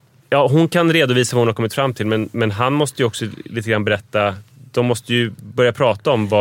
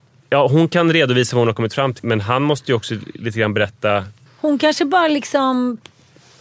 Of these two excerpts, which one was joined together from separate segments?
second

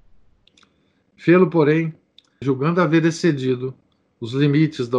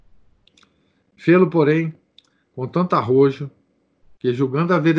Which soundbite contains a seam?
first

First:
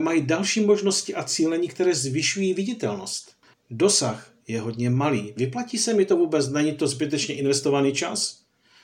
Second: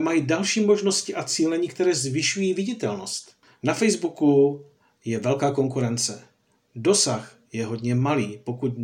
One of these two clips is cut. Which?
first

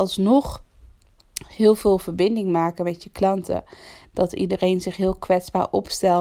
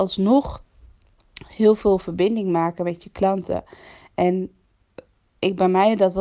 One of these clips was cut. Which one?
first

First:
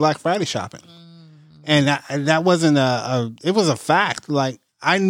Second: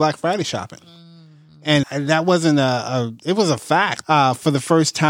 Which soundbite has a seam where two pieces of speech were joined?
second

